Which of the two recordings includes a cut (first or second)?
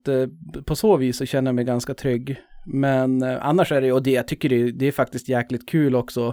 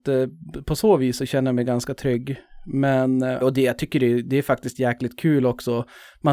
second